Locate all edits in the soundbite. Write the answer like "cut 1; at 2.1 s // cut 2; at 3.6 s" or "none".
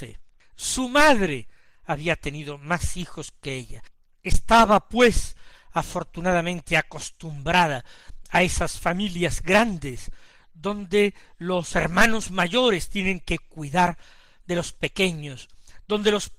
none

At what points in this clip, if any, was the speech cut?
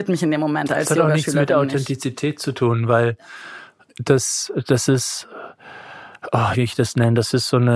cut 1; at 3.9 s // cut 2; at 6.5 s

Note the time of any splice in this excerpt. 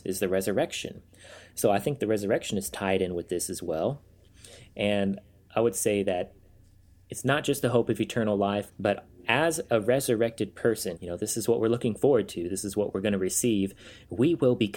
cut 1; at 8.7 s // cut 2; at 11.0 s

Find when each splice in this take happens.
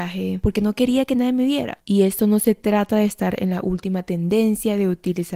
cut 1; at 1.8 s

